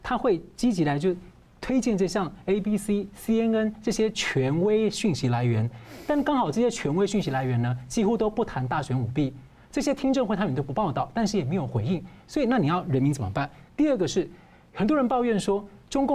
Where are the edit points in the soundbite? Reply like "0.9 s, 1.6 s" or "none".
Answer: none